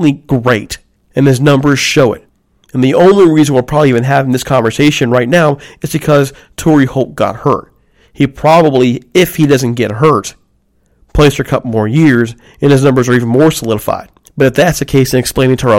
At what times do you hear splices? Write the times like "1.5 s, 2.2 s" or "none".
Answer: none